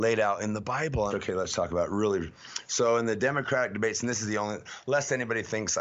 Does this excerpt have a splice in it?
yes; 1 cut; at 1.1 s

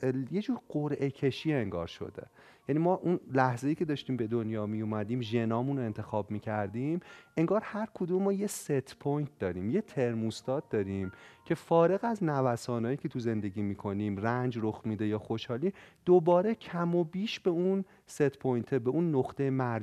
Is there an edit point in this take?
no; 0 cuts

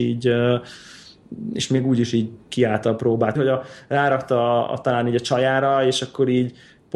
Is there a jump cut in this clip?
yes; 1 cut; at 3.4 s

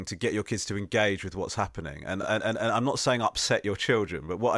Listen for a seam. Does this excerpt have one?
no; 0 cuts

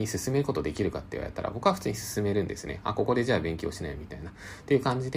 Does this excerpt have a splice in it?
no; 0 cuts

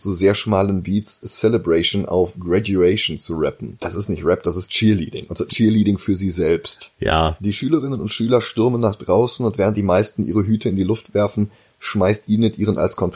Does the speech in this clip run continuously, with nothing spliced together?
yes; 0 cuts

